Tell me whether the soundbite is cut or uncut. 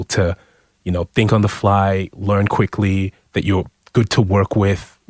uncut